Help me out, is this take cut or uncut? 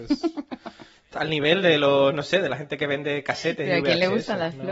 uncut